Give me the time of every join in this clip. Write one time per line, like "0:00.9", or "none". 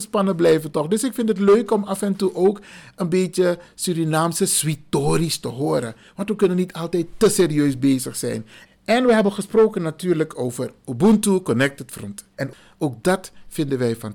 0:08.7
0:12.3